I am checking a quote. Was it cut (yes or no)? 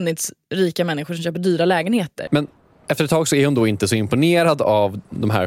yes